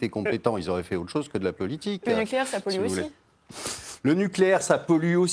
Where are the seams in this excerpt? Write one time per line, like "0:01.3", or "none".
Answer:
none